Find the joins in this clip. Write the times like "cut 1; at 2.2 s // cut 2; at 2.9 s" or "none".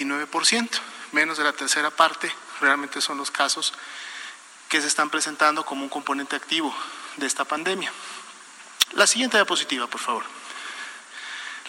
cut 1; at 8.9 s